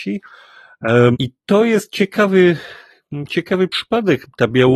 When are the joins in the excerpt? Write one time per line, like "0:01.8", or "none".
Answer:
0:01.1